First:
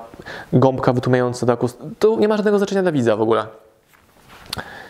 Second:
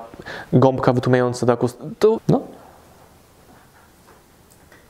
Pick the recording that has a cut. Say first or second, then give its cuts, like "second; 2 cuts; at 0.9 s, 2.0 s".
second; 1 cut; at 2.2 s